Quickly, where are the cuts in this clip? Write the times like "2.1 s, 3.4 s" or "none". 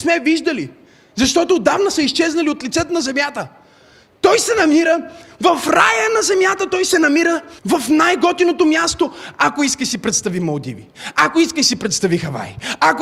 7.6 s